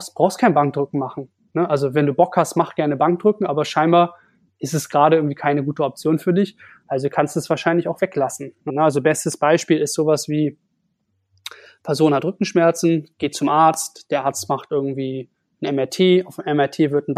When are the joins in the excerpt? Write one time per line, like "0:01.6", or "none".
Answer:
0:08.7